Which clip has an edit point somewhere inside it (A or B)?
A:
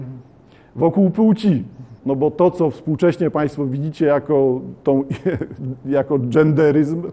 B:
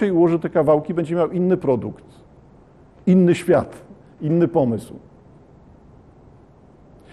A